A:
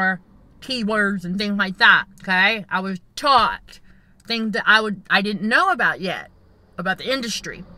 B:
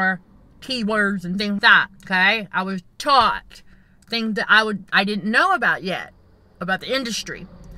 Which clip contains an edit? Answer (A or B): B